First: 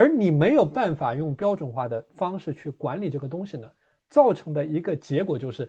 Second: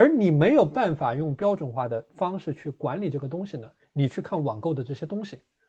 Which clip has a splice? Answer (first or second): second